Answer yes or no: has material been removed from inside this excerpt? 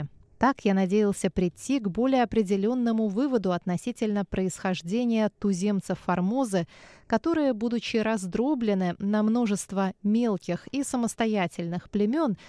no